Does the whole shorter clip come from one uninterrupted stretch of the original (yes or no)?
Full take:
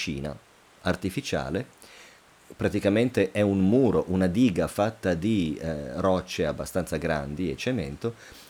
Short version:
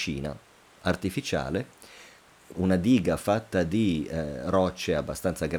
no